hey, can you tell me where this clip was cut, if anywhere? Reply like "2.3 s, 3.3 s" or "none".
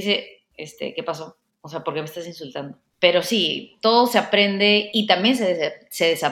2.9 s